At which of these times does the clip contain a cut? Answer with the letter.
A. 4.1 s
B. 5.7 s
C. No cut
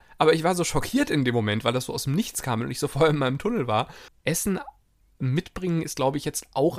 A